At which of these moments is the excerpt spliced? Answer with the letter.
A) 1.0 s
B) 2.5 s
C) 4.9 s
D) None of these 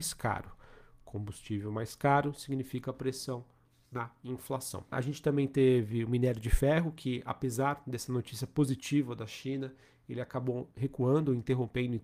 C